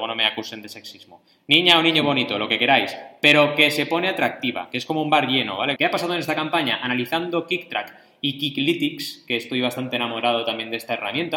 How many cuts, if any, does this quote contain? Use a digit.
1